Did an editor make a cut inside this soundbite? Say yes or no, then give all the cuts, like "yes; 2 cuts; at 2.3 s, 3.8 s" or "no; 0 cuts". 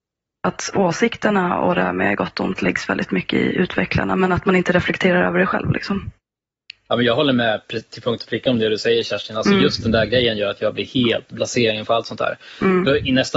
no; 0 cuts